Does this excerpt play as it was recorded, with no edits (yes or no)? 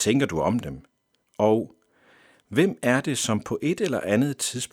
no